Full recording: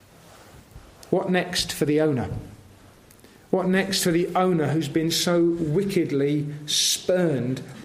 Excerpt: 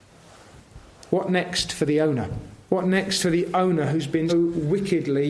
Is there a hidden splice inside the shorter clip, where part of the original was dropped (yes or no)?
yes